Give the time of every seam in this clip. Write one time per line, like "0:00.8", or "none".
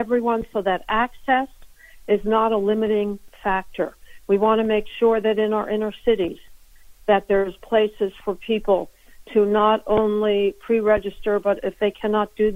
none